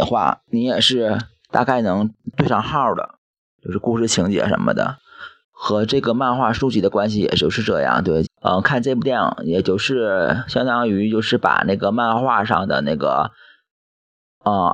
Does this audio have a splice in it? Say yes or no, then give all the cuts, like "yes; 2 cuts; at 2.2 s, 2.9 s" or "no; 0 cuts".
yes; 2 cuts; at 5.4 s, 8.3 s